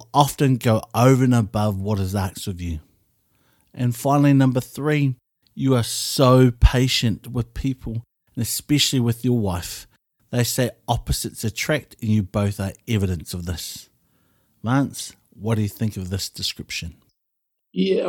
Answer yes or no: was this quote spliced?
no